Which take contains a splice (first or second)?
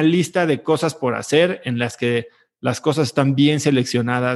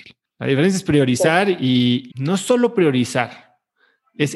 second